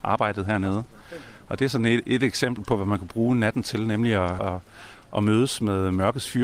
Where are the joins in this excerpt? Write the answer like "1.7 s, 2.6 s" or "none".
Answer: 4.4 s